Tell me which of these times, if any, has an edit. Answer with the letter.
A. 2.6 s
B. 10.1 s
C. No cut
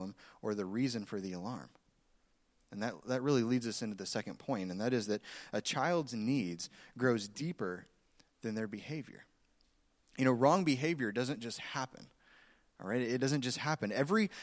A